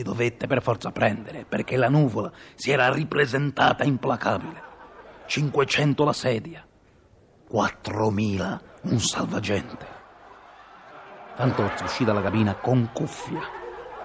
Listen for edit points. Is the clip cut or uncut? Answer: uncut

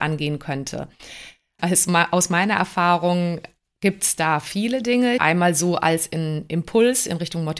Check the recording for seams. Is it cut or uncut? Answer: cut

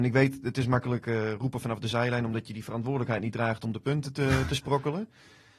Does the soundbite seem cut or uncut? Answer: uncut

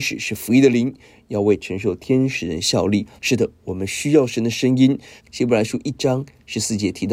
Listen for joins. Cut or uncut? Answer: cut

